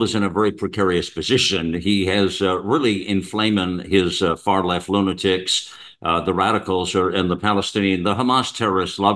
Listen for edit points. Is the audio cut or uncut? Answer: uncut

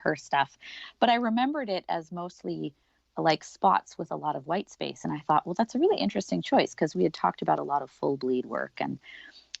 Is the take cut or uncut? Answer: uncut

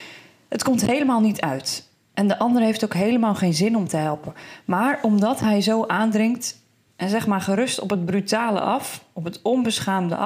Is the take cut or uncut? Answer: uncut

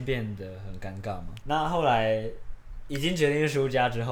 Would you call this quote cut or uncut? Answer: cut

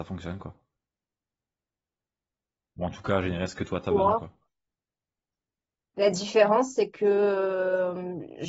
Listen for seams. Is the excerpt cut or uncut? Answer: uncut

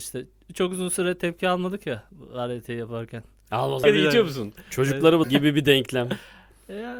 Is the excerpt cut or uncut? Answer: cut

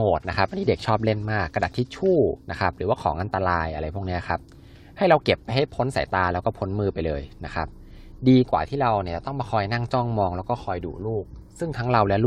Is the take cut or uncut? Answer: cut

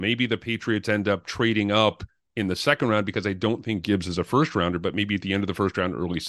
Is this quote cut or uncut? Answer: uncut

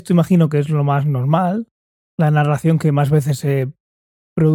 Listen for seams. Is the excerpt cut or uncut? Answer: uncut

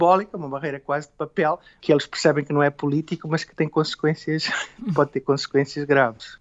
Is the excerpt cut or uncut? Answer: cut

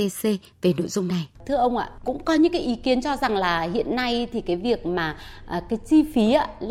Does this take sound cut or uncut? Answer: cut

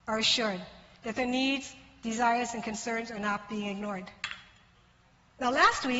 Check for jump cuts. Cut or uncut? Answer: uncut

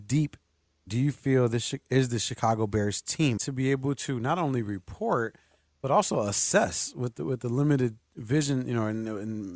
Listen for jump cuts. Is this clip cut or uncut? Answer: cut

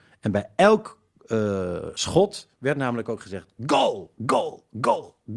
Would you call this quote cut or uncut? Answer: cut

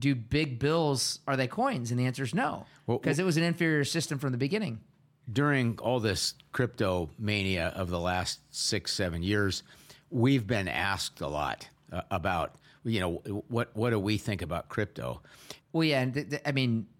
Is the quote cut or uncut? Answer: cut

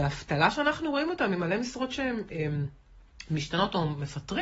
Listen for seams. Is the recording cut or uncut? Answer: uncut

